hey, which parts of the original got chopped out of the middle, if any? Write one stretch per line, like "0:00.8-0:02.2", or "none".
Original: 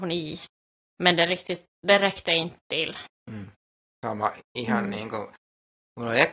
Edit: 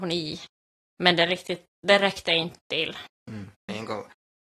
0:03.7-0:04.9